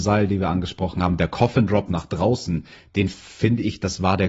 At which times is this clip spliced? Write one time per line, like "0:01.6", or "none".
none